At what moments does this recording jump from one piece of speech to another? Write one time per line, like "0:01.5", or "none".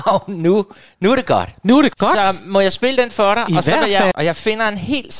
0:01.9
0:04.1